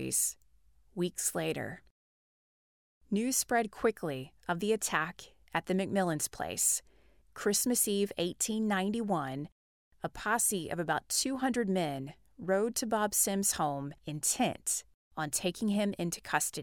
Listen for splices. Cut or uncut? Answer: cut